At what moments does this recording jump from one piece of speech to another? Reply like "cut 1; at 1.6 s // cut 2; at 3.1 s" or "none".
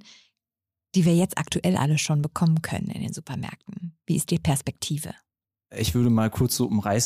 cut 1; at 4.0 s